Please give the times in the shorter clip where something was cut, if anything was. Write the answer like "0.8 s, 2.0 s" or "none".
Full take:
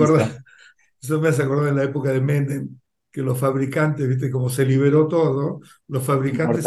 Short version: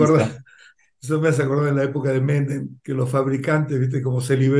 2.8 s